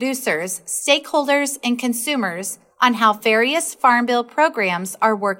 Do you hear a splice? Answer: no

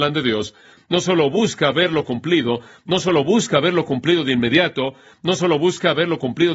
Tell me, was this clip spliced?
no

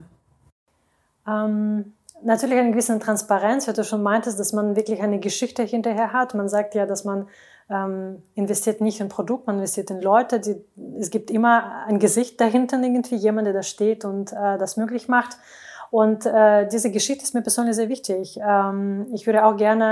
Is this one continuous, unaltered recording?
yes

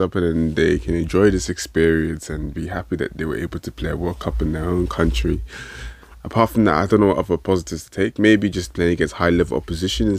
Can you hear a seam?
no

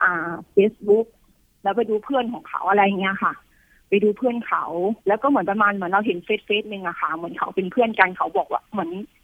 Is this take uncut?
no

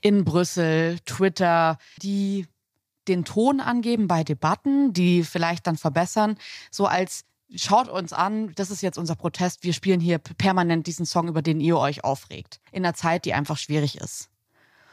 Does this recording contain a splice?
yes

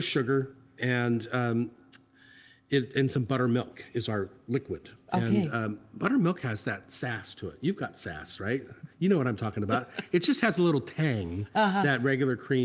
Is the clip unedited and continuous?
yes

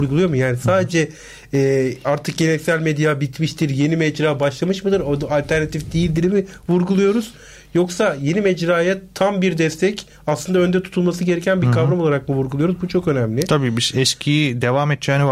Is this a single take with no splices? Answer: yes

